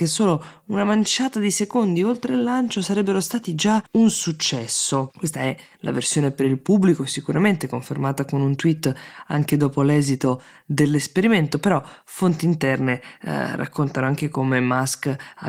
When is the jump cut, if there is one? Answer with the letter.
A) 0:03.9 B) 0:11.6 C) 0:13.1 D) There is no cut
A